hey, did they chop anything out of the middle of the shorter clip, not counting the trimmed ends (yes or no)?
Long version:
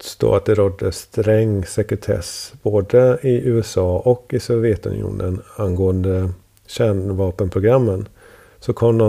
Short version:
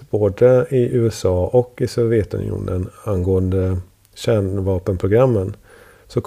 no